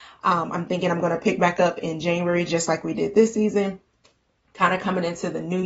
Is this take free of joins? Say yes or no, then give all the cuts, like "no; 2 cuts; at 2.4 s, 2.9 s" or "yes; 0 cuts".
yes; 0 cuts